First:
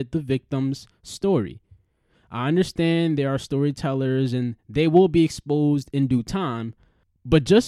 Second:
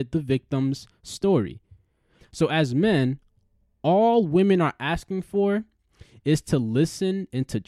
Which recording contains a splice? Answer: second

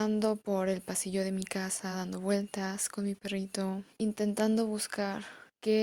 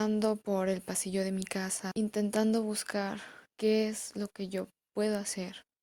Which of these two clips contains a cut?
second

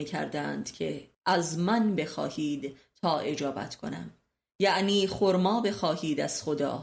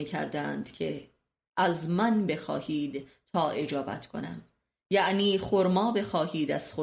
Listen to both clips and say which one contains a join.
first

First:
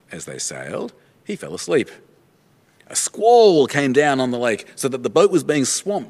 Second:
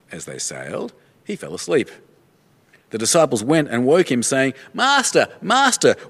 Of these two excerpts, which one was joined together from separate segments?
second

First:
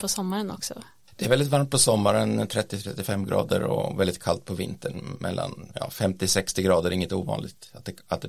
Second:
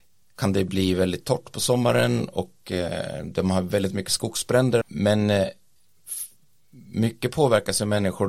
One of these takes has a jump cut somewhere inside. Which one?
second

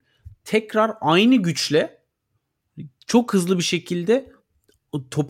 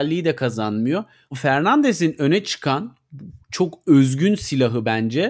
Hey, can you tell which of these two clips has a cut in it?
second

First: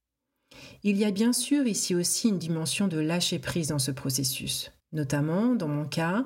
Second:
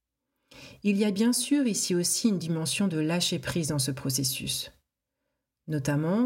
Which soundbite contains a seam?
first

